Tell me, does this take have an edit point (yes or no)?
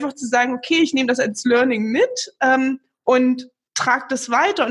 no